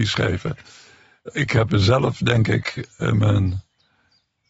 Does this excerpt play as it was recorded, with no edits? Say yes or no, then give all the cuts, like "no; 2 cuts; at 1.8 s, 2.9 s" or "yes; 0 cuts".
yes; 0 cuts